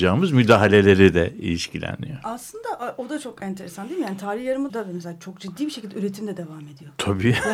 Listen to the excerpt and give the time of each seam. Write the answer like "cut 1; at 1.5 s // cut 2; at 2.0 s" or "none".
cut 1; at 4.7 s